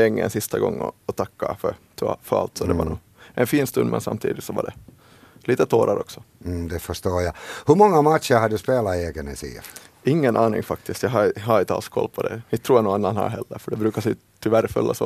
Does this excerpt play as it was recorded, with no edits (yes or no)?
yes